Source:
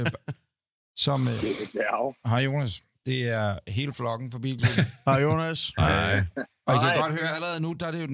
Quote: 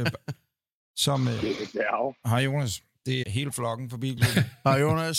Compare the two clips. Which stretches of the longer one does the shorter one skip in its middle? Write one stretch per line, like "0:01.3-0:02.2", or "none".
0:03.2-0:03.6